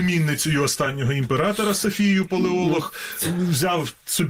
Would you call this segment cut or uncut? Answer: uncut